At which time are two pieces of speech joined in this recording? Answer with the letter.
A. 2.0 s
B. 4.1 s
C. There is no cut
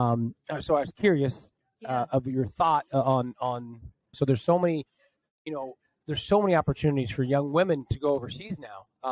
B